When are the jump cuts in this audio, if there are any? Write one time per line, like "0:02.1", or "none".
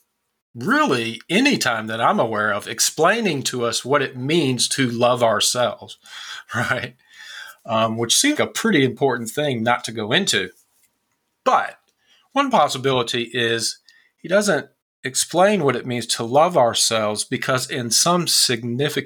0:08.4